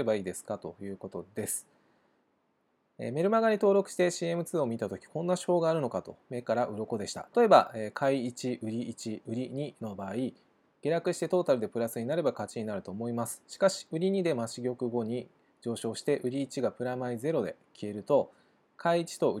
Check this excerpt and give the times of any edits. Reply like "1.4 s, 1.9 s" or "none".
7.3 s